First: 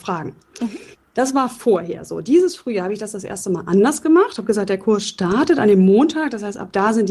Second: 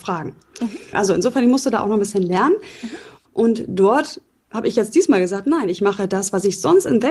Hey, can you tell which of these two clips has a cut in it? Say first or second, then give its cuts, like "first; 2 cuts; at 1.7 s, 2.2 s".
second; 2 cuts; at 0.9 s, 3.2 s